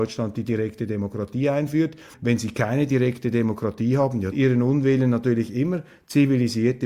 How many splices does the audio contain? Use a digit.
2